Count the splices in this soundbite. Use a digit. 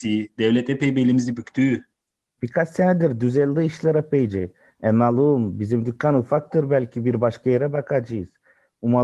1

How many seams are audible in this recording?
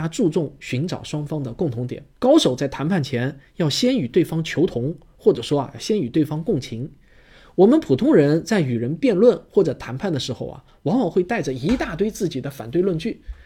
1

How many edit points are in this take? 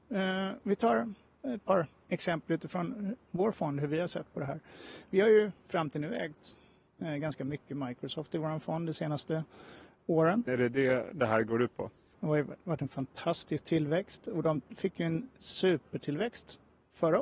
2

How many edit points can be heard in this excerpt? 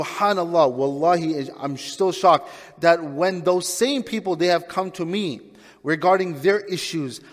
0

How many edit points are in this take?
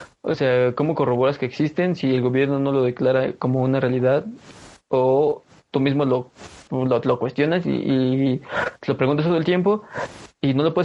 1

